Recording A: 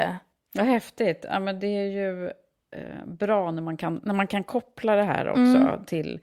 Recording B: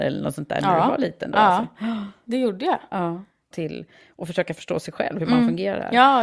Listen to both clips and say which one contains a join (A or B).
B